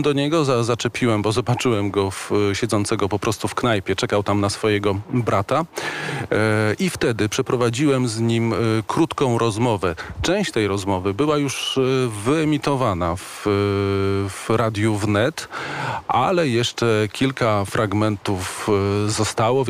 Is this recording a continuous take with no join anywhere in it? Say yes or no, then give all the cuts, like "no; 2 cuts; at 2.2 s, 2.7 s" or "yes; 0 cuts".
yes; 0 cuts